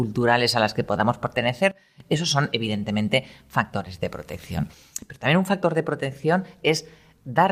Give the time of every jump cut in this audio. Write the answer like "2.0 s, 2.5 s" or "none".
none